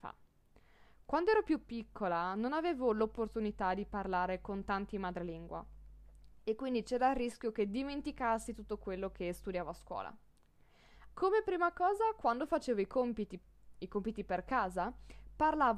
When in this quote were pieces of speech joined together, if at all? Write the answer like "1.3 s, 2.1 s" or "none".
11.1 s